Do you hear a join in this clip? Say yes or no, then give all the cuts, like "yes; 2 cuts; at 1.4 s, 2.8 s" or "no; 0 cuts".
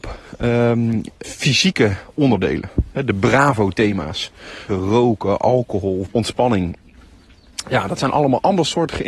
yes; 3 cuts; at 1.2 s, 4.7 s, 6.1 s